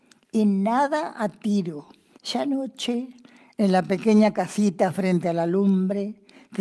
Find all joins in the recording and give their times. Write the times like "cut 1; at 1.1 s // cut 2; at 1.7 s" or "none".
cut 1; at 2.1 s